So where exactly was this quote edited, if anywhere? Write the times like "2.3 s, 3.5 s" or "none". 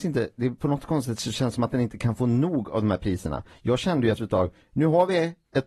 none